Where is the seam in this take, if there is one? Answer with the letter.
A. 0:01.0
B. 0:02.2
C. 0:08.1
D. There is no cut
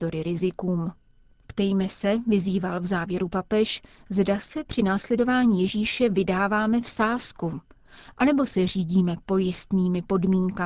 D